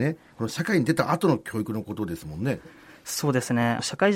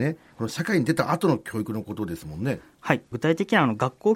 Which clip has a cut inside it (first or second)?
first